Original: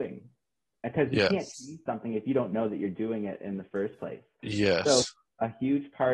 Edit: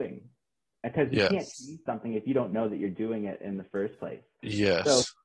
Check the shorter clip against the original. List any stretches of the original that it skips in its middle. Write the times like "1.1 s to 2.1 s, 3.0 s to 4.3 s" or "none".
none